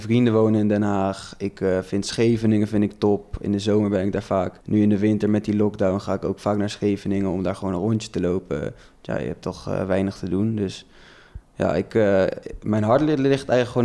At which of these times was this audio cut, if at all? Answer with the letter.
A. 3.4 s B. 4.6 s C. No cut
B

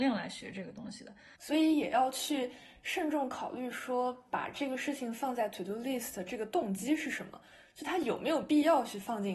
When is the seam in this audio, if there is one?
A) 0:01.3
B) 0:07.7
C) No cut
A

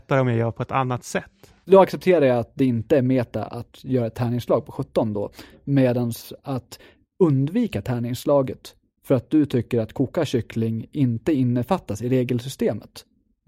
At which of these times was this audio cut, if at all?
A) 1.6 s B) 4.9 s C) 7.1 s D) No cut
A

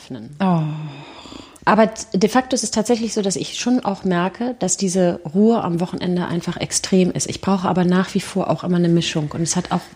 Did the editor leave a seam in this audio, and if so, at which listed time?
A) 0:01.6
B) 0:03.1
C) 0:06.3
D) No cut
A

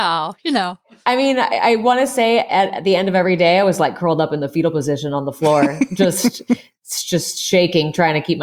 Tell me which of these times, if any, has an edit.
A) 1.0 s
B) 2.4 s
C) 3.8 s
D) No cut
D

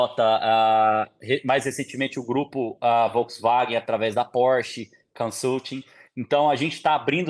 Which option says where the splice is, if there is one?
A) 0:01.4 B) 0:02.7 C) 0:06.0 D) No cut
D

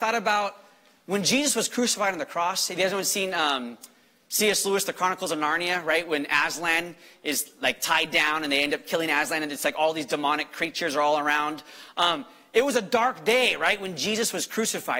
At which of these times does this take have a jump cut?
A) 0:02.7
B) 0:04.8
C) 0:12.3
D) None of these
D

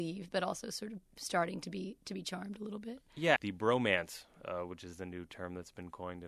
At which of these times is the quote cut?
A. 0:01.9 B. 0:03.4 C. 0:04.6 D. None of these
B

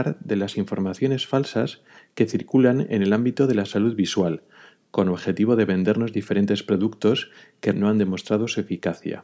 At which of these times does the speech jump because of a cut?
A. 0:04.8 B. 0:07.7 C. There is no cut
B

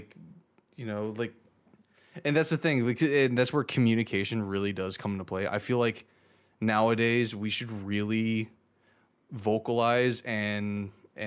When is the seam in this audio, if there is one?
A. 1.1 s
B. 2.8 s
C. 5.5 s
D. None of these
D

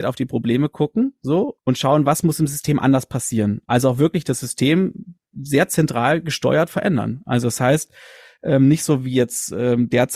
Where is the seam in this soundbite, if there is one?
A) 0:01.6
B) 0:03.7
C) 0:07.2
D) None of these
A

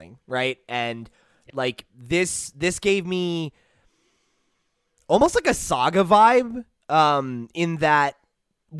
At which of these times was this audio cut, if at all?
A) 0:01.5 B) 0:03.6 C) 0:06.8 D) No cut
A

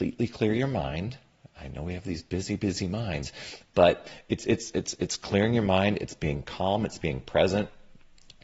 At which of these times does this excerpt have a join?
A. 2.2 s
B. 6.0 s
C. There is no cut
C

